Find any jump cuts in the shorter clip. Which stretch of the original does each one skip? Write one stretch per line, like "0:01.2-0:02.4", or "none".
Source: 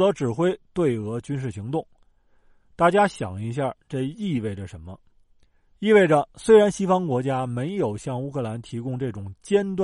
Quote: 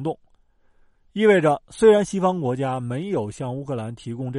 0:02.6-0:05.6